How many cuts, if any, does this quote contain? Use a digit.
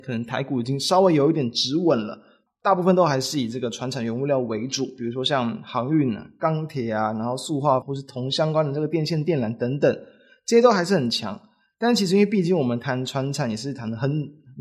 2